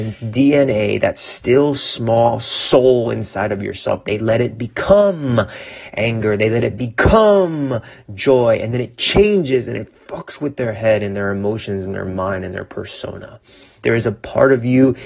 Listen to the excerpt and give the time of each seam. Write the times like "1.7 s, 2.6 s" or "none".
13.8 s